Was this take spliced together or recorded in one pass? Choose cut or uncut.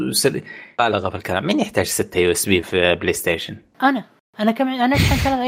uncut